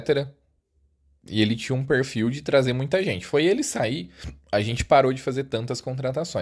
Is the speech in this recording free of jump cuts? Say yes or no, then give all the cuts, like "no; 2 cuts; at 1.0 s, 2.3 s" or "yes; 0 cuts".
yes; 0 cuts